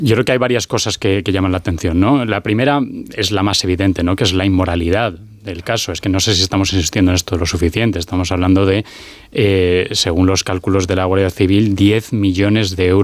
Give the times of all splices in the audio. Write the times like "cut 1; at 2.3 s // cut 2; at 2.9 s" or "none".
none